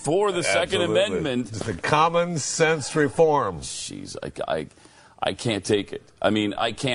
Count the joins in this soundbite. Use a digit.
0